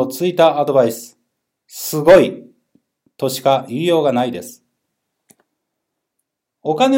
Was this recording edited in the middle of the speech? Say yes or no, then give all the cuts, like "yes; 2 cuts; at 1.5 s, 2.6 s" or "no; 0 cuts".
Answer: no; 0 cuts